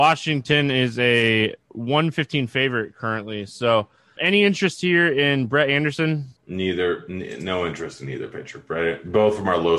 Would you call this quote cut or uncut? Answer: cut